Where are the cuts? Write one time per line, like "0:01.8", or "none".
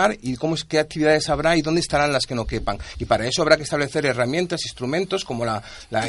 none